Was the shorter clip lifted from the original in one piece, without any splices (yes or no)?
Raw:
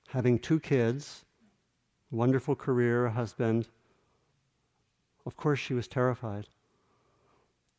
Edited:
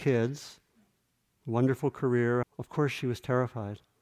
no